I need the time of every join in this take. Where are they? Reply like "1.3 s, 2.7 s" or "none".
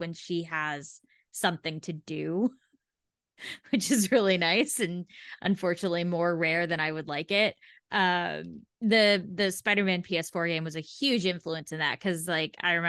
none